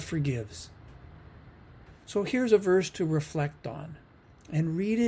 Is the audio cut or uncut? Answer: uncut